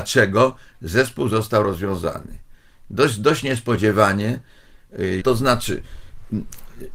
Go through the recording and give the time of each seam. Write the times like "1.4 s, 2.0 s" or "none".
5.2 s

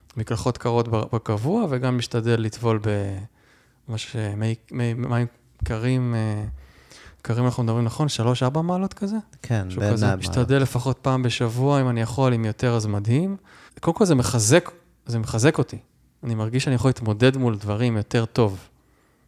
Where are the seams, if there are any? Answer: 10.2 s, 13.7 s

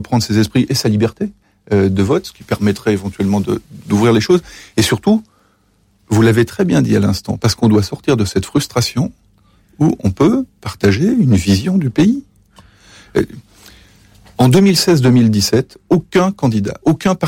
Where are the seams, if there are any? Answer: none

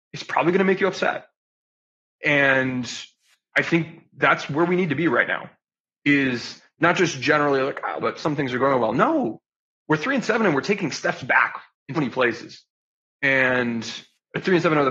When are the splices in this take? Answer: 8.0 s, 11.9 s

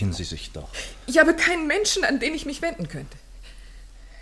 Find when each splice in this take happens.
none

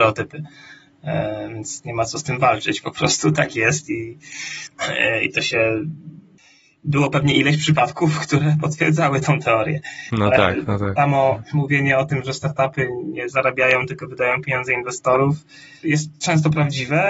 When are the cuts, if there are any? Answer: 15.8 s

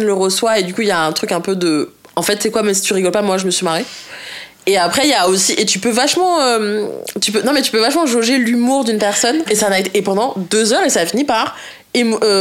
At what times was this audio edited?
9.5 s

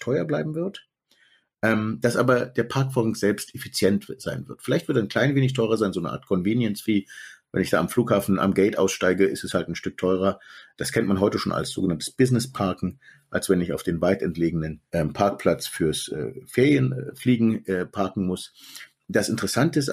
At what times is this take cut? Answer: 14.9 s

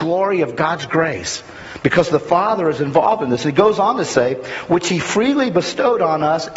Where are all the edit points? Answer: none

